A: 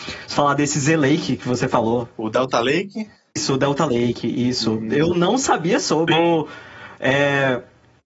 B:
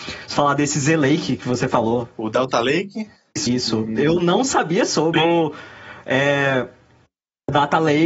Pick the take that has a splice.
B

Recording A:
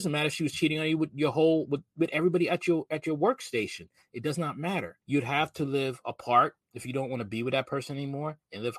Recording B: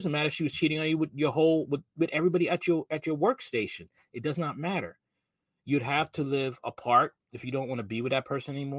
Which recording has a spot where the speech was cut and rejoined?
A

